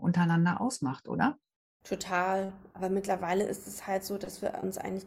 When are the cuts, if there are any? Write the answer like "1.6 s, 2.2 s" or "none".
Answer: 2.7 s